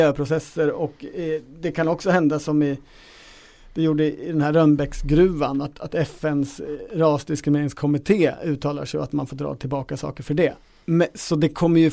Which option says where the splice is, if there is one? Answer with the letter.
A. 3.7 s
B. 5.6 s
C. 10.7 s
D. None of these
D